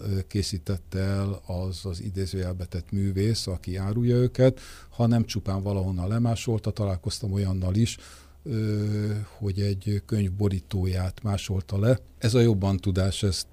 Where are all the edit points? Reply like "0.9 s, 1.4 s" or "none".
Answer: 12.2 s